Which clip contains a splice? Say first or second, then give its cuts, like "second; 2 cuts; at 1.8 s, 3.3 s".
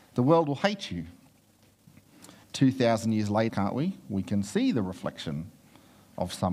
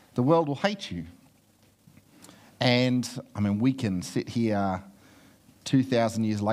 first; 2 cuts; at 2.4 s, 3.5 s